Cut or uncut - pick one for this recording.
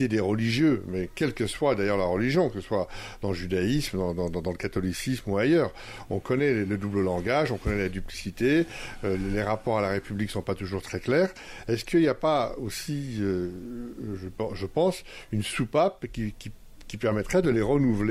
uncut